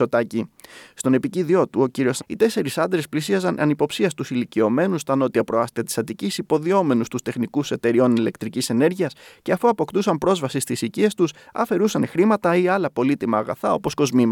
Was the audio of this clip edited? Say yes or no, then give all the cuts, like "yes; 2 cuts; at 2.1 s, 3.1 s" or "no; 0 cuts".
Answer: yes; 1 cut; at 2.2 s